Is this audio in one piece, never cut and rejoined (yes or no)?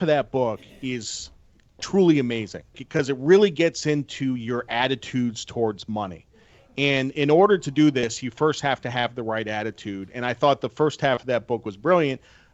no